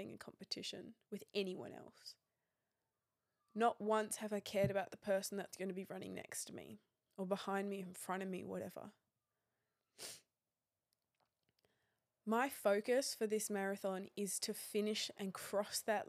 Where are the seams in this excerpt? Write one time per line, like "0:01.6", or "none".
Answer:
none